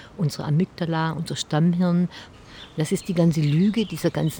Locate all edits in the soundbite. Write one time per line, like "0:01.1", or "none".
0:02.3